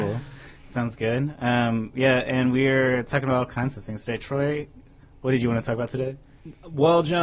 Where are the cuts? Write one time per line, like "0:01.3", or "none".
none